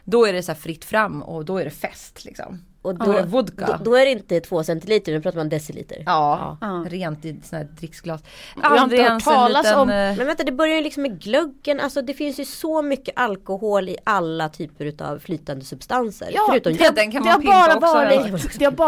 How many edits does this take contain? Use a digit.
2